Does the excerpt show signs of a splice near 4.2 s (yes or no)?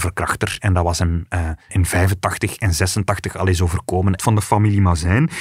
yes